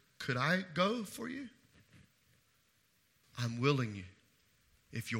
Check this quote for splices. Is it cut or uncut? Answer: cut